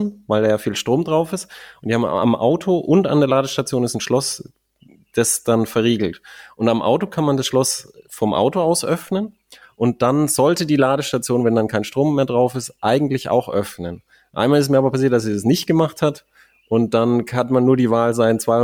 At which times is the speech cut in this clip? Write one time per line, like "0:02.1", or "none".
none